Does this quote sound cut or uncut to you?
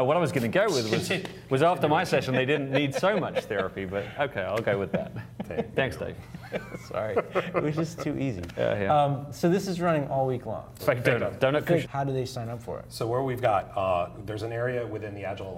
cut